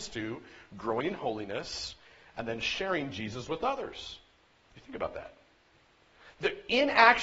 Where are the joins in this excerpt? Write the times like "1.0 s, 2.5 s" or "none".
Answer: 4.7 s

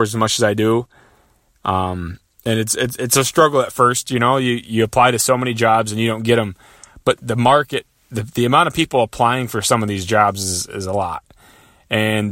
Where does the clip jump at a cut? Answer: none

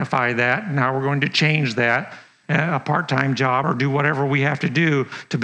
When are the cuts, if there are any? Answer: 2.4 s, 3.6 s

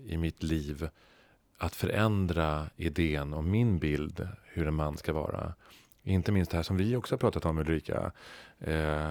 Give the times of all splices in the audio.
none

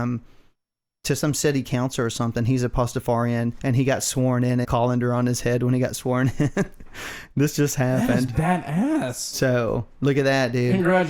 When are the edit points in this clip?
4.6 s

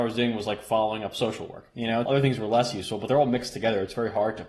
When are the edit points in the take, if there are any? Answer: 2.1 s

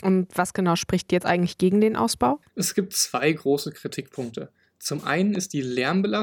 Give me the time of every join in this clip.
none

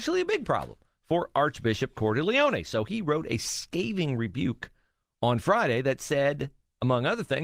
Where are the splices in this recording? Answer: none

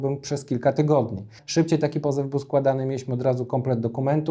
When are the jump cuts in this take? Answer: 1.4 s

